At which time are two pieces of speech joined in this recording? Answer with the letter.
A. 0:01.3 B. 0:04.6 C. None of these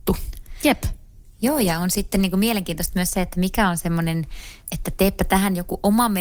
B